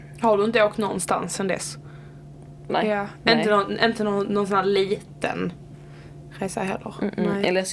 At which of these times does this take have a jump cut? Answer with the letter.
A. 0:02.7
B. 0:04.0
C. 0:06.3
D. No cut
A